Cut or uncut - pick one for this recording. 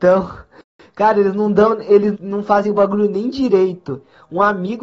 cut